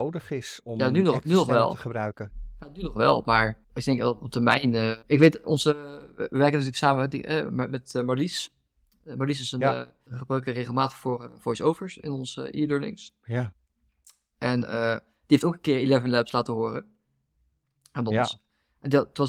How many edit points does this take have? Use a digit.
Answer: 1